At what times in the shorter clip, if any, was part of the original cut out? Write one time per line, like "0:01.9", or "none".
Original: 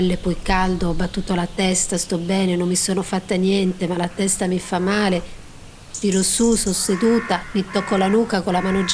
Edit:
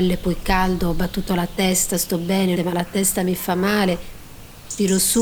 0:02.6